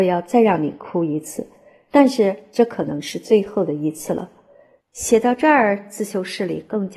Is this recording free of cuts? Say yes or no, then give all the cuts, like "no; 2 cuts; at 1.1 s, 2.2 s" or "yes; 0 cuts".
no; 1 cut; at 4.8 s